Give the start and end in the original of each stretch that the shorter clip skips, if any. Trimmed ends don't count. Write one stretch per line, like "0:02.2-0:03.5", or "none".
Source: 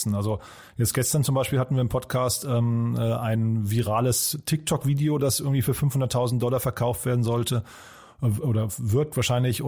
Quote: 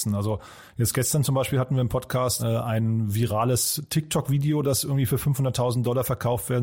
0:02.4-0:03.0